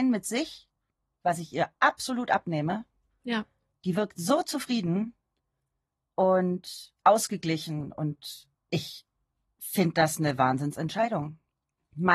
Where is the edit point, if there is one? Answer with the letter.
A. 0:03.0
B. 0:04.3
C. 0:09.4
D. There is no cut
D